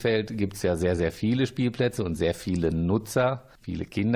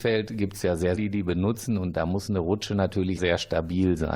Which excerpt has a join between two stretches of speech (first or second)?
second